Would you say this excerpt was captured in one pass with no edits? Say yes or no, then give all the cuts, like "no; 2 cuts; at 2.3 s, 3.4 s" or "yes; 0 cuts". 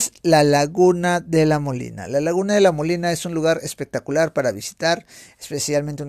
yes; 0 cuts